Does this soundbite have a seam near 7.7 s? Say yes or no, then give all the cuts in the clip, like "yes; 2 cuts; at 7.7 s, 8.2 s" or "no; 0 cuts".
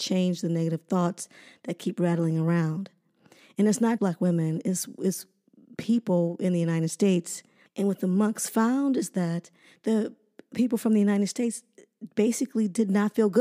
yes; 2 cuts; at 4.0 s, 7.7 s